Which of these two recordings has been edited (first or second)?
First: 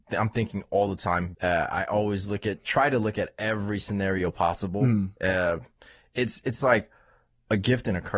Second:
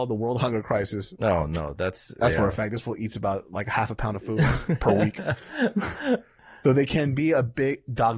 first